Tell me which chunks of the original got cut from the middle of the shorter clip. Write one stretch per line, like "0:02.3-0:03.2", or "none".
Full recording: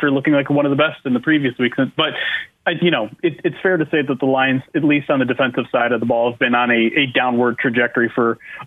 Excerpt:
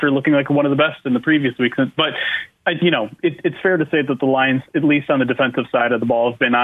none

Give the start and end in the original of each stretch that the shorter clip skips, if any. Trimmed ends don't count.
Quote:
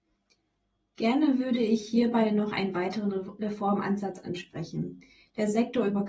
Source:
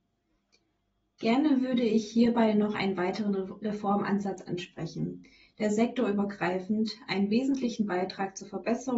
none

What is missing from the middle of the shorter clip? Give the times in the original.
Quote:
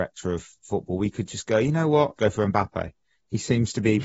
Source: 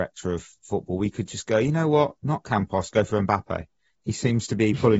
0:02.2-0:02.9

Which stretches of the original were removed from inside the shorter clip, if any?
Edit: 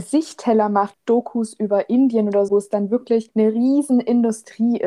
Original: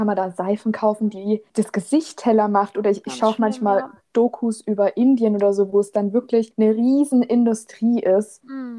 0:02.7-0:04.0
0:05.6-0:05.7

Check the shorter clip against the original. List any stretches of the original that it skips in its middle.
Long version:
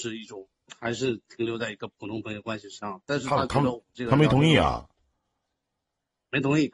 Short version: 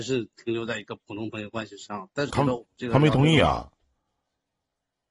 0:03.2-0:03.5

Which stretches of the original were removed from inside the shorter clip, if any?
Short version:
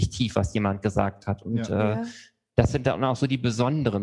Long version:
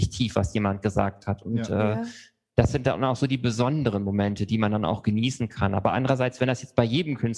none

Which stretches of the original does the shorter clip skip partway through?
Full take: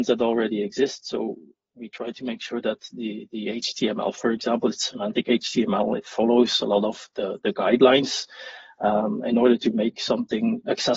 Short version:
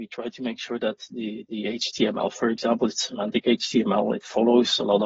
none

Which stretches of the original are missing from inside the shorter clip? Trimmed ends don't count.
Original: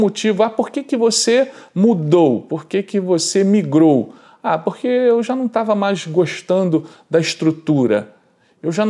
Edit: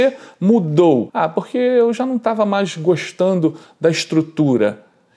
0:02.4-0:04.4

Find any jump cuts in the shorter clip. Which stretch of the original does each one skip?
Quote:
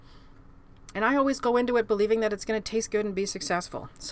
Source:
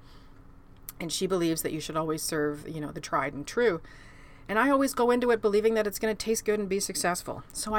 0:00.9-0:04.5

